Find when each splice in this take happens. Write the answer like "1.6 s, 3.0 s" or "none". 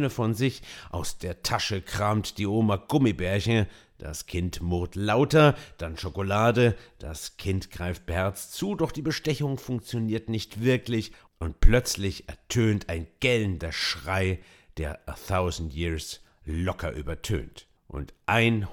17.8 s